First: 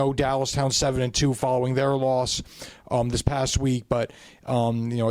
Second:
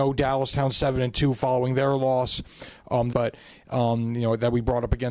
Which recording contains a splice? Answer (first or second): second